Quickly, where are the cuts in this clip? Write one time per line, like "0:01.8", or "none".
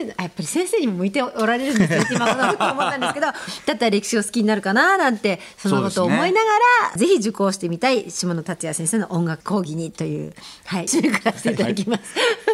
0:07.0
0:10.9